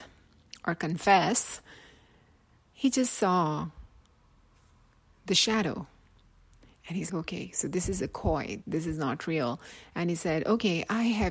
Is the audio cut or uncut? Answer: cut